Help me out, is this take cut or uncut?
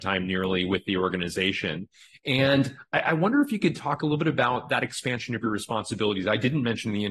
uncut